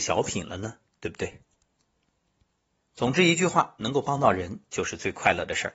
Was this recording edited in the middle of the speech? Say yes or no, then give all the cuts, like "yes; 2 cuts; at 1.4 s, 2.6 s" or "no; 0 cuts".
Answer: no; 0 cuts